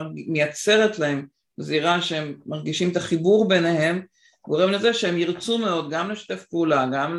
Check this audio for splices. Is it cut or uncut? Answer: uncut